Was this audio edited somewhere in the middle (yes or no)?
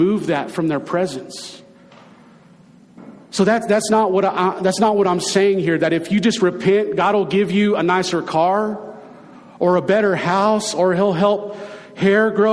no